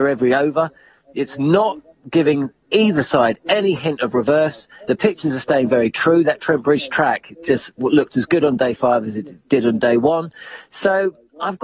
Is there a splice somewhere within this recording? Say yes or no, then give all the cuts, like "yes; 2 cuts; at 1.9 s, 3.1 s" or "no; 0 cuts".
no; 0 cuts